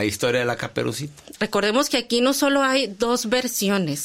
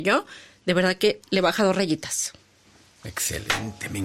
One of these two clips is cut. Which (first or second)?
first